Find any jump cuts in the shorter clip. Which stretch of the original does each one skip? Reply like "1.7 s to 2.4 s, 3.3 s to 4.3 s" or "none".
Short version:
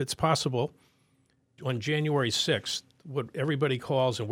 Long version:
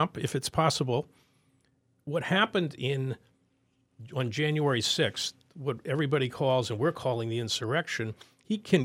1.9 s to 4.1 s

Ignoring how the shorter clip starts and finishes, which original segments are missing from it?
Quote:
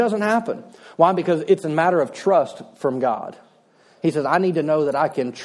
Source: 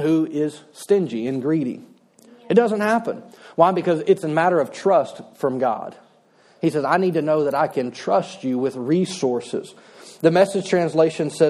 none

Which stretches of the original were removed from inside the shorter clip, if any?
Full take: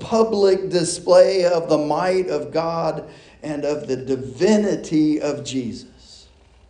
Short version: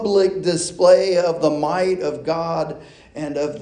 none

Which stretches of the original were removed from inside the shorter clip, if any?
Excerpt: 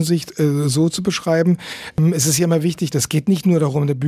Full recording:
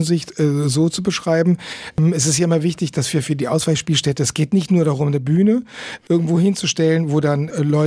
2.9 s to 4.2 s

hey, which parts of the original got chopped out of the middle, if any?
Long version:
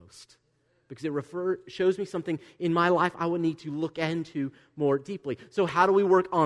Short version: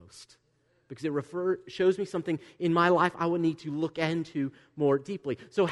none

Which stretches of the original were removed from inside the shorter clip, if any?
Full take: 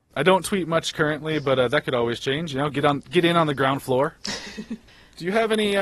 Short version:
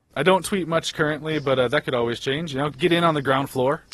2.7 s to 3.0 s

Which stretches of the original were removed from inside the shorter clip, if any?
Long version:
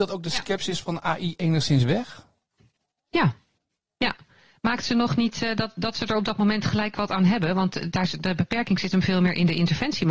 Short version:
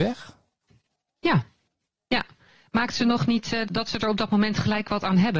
5.6 s to 5.7 s

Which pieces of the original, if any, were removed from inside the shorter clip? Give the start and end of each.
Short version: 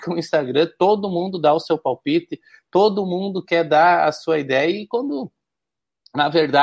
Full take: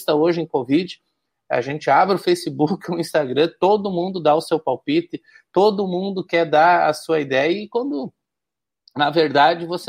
none

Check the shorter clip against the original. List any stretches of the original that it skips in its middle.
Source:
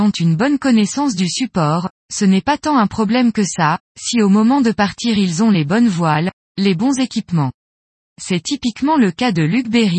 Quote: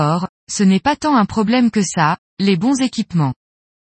3.9 s to 6.4 s

